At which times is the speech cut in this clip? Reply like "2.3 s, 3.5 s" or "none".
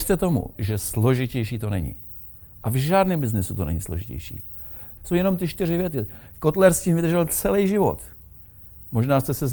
5.0 s